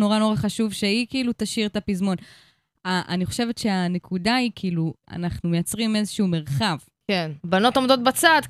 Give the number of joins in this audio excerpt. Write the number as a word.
two